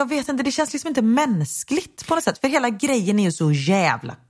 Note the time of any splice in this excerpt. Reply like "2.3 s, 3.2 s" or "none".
none